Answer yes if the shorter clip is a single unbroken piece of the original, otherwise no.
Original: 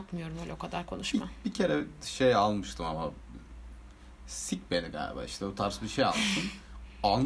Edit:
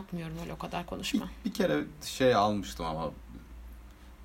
yes